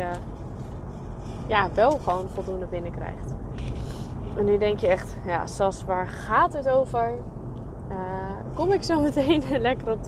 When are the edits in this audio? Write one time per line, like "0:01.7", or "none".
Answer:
none